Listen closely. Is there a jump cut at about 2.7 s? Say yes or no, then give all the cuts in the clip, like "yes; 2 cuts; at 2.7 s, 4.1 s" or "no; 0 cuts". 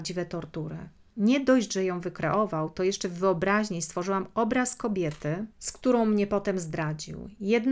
no; 2 cuts; at 1.1 s, 5.5 s